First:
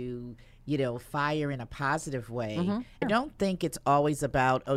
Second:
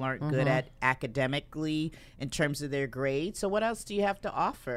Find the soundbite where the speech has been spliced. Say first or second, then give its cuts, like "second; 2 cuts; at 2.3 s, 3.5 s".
first; 1 cut; at 3.0 s